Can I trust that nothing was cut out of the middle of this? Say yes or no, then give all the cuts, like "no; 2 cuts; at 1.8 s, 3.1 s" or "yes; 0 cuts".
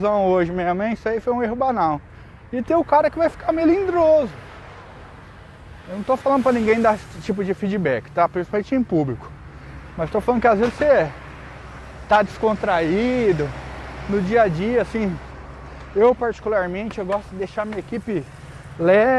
yes; 0 cuts